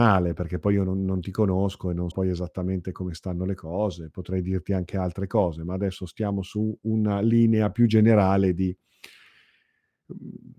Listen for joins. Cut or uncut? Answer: cut